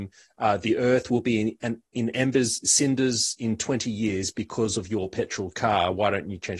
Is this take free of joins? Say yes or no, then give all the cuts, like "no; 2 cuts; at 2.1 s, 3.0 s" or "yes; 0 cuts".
yes; 0 cuts